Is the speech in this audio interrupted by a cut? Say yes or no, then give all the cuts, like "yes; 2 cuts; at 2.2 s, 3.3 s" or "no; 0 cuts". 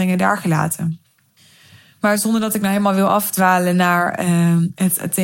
no; 0 cuts